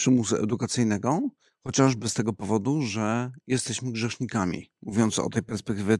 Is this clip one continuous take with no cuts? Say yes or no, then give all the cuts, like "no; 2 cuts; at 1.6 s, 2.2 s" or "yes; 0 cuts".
yes; 0 cuts